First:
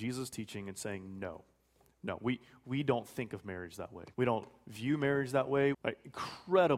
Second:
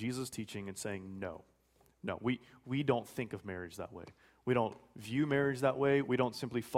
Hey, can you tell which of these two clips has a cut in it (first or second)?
first